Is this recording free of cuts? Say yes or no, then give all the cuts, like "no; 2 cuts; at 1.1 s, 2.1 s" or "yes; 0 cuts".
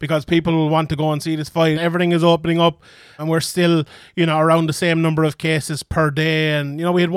no; 2 cuts; at 1.7 s, 3.2 s